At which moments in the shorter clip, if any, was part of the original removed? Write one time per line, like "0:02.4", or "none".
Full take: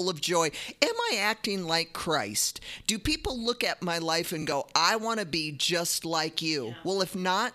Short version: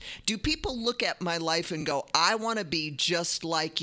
none